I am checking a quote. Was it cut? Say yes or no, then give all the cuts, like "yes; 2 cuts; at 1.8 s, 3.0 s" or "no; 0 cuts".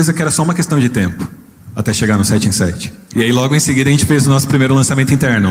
no; 0 cuts